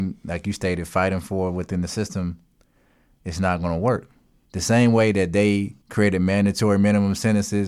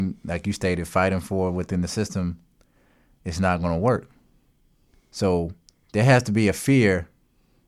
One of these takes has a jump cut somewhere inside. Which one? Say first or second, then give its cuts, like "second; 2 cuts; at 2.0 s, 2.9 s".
first; 2 cuts; at 4.4 s, 5.8 s